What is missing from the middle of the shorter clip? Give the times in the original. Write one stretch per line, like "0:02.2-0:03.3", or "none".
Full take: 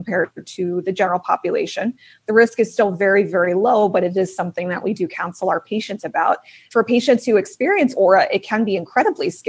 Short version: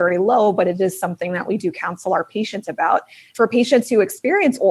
none